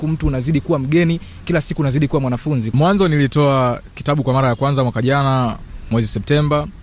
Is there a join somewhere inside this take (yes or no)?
yes